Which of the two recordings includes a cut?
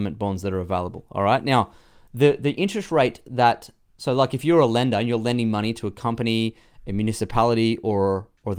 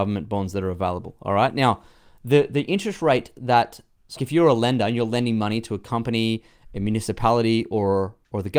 second; 1 cut; at 4.2 s

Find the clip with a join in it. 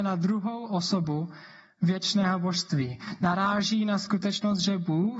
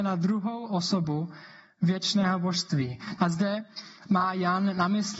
second; 1 cut; at 3.2 s

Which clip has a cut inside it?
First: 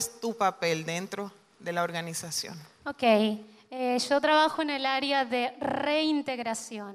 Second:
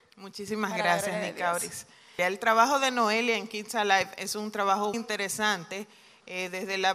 second; 2 cuts; at 2.2 s, 4.9 s

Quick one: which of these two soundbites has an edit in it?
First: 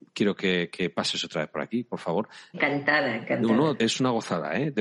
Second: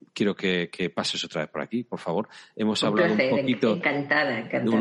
first; 2 cuts; at 2.5 s, 3.8 s

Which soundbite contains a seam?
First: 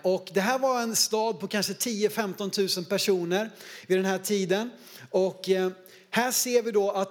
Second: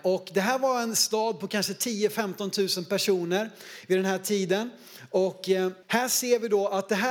second; 1 cut; at 5.8 s

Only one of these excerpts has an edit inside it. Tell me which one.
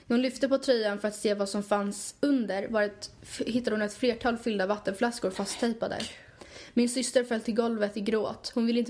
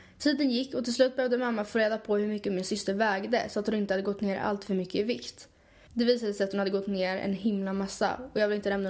second; 1 cut; at 5.9 s

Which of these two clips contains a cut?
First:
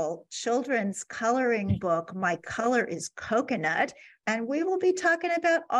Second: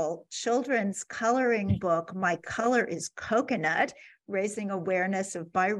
first; 1 cut; at 4.2 s

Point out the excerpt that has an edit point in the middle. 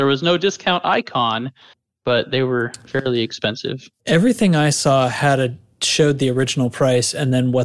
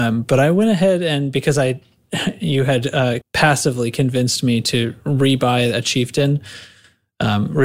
second; 1 cut; at 3.2 s

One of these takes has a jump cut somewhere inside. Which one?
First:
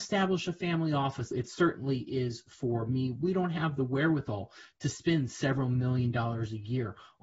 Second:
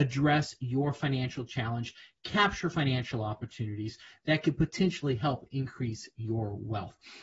first; 1 cut; at 1.3 s

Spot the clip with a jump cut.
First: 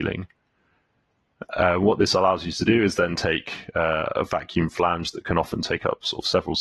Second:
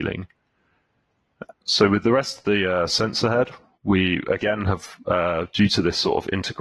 second; 1 cut; at 1.5 s

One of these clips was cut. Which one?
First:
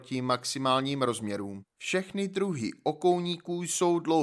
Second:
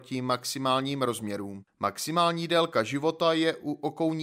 second; 1 cut; at 1.7 s

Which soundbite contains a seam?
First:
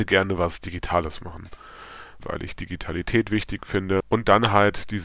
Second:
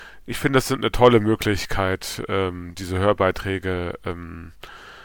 first; 1 cut; at 2.2 s

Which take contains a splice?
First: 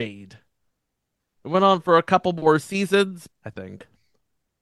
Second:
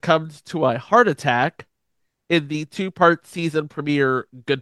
first; 1 cut; at 3.3 s

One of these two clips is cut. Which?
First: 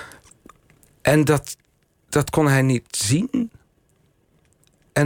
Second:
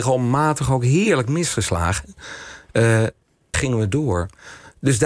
second; 1 cut; at 3.5 s

